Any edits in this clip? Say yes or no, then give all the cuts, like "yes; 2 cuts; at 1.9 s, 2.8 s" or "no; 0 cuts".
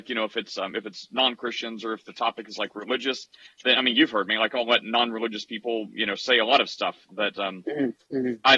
no; 0 cuts